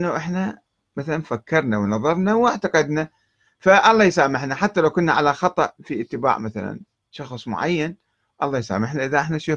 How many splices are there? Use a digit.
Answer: 0